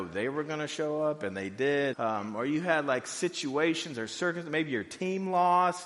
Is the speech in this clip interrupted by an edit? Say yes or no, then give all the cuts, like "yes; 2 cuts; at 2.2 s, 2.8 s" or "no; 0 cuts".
yes; 1 cut; at 1.9 s